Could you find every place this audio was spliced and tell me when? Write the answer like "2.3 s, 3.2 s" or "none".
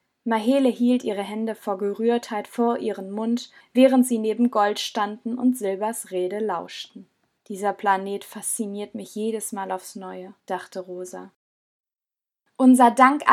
3.6 s, 7.4 s, 10.4 s